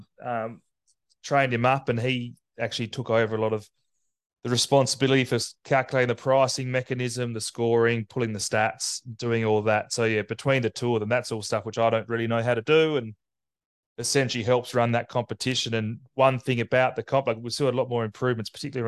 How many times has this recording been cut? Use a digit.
0